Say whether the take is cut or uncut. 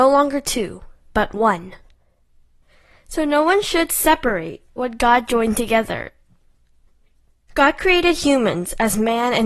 uncut